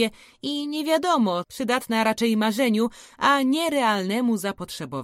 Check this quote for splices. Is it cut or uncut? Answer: cut